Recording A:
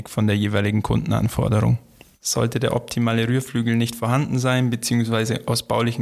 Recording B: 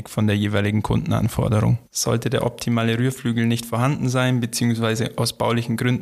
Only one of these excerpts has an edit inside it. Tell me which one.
B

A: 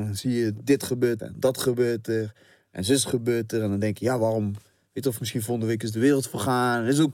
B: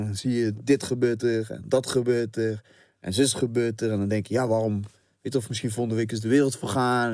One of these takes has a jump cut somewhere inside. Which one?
A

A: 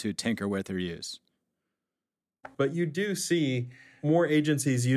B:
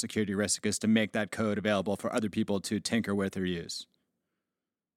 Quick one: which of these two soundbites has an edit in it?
A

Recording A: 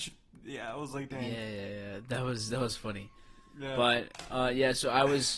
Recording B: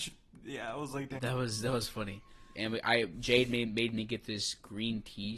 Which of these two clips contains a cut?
B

